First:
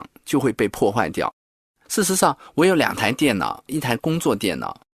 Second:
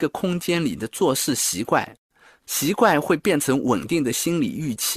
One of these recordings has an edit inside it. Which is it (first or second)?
first